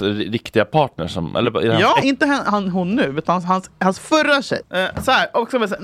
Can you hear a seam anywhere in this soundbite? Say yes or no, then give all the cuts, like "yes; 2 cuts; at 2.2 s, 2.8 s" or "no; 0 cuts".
yes; 2 cuts; at 2.0 s, 4.6 s